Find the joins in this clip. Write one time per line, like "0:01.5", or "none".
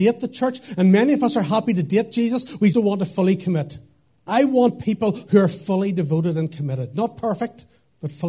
0:02.7
0:04.3